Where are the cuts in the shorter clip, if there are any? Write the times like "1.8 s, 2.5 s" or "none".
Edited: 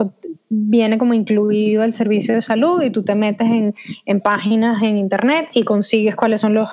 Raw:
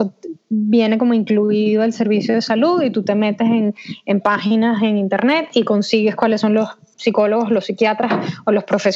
none